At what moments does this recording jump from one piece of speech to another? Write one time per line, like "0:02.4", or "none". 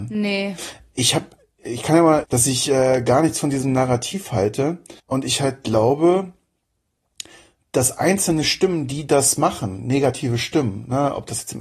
0:02.2
0:05.0